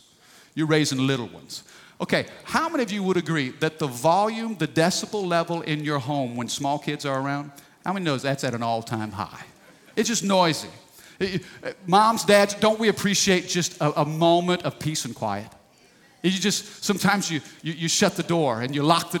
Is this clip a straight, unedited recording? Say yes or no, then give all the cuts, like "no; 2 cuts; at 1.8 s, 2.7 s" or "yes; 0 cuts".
yes; 0 cuts